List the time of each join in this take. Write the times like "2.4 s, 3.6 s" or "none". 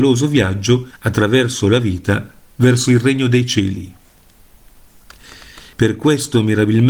5.7 s